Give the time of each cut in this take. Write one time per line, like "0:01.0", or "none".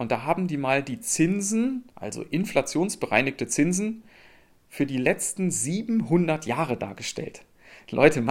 0:01.9